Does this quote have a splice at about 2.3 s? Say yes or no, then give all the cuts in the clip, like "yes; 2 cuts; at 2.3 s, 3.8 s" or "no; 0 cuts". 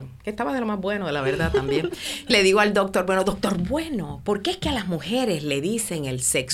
yes; 1 cut; at 2.3 s